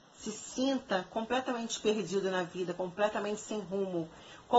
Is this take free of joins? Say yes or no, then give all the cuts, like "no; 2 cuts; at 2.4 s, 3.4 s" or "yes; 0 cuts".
yes; 0 cuts